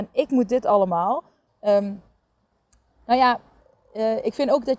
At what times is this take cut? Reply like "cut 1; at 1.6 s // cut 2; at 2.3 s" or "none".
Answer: cut 1; at 1.5 s